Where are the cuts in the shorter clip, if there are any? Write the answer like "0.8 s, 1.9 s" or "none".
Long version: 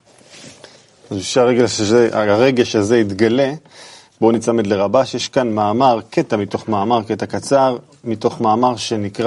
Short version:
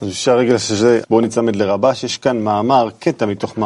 1.0 s